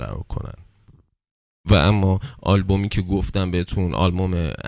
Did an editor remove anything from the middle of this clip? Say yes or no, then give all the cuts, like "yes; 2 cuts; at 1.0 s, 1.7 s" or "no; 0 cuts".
no; 0 cuts